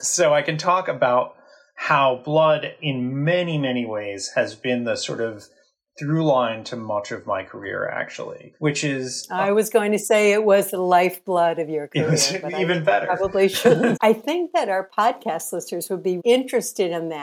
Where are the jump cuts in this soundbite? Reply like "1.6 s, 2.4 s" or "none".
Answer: 14.0 s, 16.2 s